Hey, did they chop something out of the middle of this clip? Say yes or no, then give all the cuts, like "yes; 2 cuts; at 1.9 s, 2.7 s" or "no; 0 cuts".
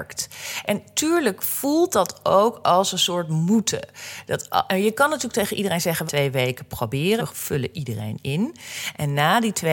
yes; 2 cuts; at 6.1 s, 7.2 s